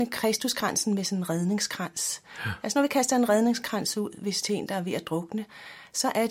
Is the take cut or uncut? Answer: uncut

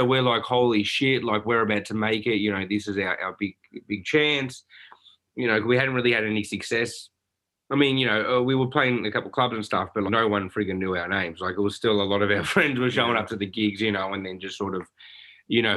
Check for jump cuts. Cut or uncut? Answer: cut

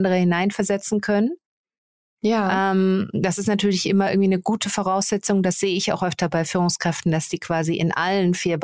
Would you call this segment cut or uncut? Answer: uncut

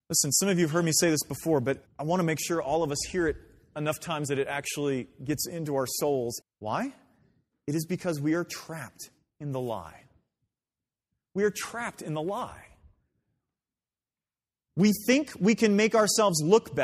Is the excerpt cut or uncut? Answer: cut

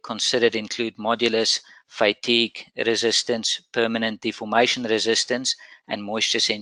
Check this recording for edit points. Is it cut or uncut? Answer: uncut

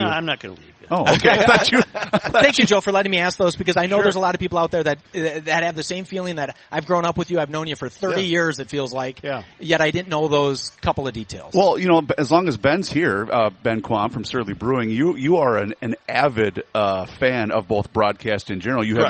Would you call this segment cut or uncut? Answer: uncut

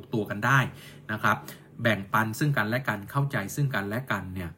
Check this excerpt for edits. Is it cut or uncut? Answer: uncut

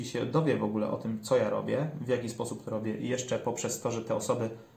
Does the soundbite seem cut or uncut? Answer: uncut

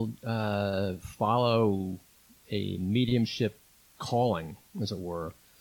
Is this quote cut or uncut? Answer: uncut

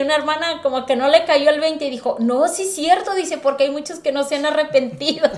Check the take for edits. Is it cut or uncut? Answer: uncut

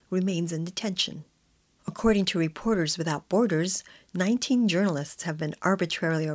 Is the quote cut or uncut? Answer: cut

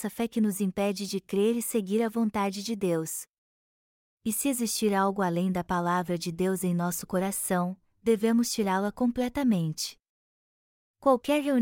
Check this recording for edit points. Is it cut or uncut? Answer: uncut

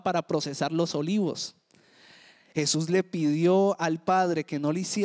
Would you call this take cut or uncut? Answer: cut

